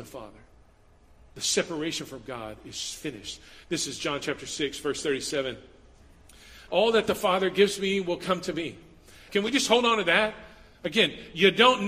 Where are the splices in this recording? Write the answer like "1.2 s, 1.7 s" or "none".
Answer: 6.7 s, 9.3 s